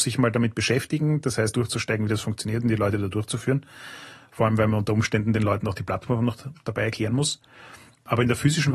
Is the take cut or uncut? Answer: cut